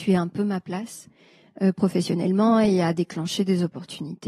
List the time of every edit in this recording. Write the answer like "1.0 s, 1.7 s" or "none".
none